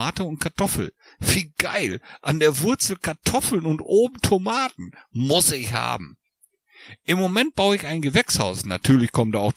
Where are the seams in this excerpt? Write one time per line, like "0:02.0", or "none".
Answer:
none